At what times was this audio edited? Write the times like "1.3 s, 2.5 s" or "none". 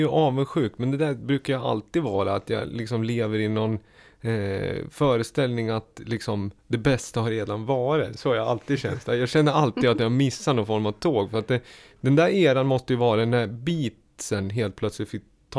none

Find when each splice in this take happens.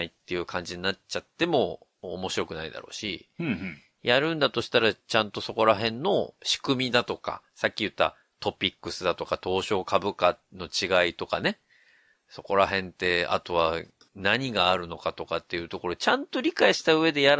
none

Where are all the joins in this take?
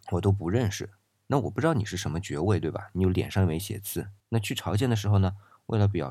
4.2 s

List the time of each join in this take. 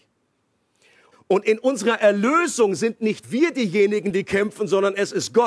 1.1 s

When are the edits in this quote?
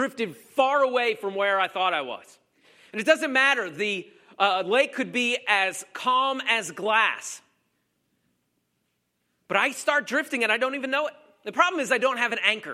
none

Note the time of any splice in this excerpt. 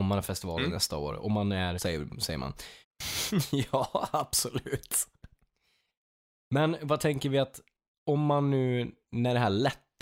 1.8 s, 2.8 s

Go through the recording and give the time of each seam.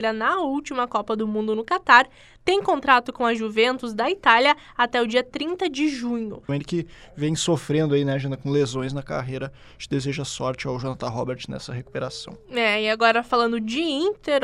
6.5 s

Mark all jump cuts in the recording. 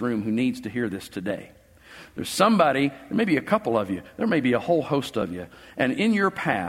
none

